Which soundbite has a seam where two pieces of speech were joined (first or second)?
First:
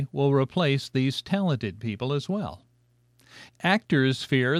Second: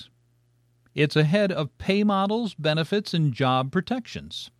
first